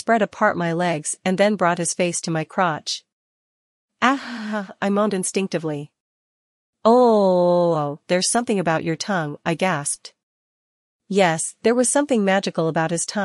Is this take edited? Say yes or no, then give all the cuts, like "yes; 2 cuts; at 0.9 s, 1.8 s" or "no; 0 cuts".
no; 0 cuts